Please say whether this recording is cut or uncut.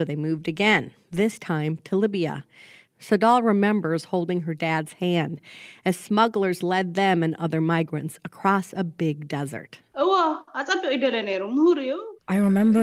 cut